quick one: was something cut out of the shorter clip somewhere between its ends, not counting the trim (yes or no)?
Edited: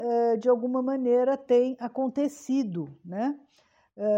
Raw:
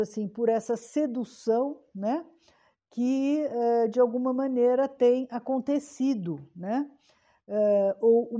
no